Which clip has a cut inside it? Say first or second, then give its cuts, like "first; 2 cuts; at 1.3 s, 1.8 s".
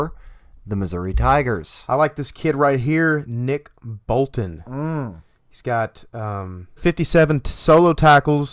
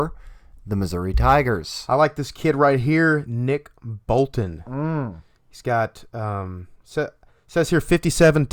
first; 1 cut; at 6.8 s